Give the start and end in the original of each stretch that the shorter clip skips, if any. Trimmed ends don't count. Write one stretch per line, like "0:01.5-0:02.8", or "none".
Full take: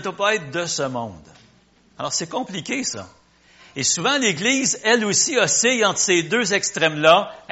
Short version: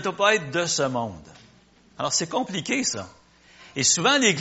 none